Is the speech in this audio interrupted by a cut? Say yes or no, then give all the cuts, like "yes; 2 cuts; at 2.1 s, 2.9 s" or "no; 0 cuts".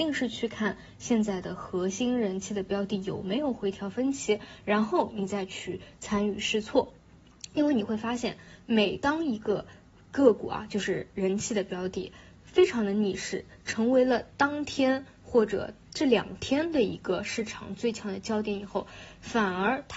no; 0 cuts